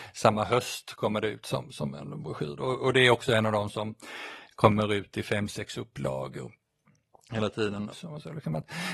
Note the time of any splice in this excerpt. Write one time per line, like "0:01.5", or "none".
0:07.9